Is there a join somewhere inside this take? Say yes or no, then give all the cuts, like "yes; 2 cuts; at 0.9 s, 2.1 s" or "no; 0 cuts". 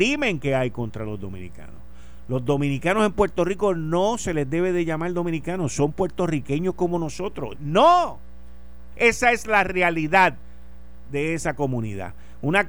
yes; 2 cuts; at 7.5 s, 8.9 s